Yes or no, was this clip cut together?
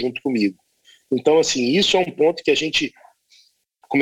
no